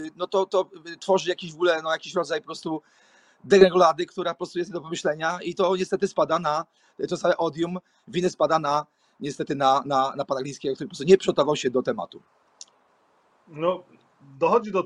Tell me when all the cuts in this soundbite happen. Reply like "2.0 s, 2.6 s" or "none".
none